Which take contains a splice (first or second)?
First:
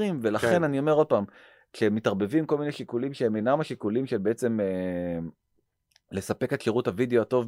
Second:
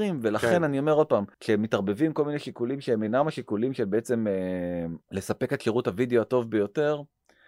second